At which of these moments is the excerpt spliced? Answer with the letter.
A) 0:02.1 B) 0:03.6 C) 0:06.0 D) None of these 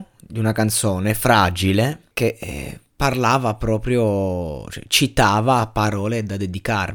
A